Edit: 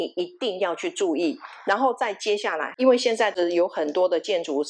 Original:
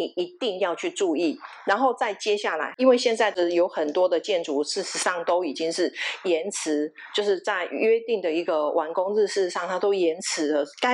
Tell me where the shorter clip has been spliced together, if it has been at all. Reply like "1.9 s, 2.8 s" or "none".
none